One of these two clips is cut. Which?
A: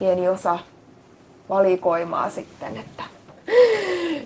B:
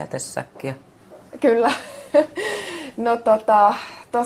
A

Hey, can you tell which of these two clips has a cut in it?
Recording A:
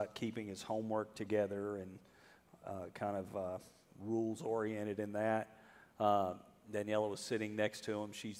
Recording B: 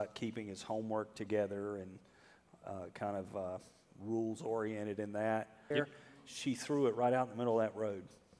B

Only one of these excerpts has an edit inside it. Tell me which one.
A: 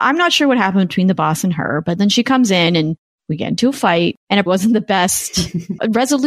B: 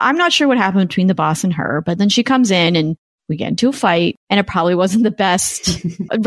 A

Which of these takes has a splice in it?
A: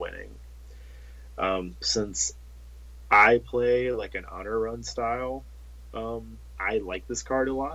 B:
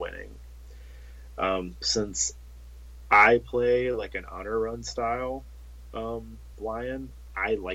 A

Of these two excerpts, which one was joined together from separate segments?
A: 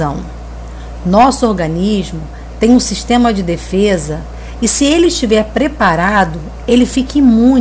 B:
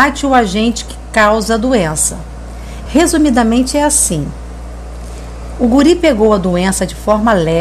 B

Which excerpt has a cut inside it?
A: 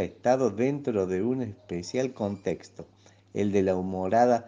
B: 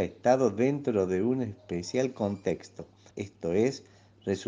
B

